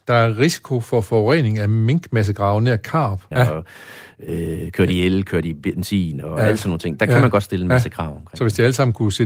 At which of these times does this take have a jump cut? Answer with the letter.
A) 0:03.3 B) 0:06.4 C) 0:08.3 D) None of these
A